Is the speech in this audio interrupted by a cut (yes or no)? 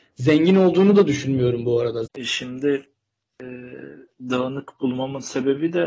yes